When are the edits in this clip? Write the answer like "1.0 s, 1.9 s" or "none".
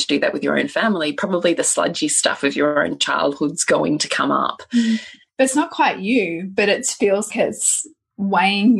5.3 s, 7.3 s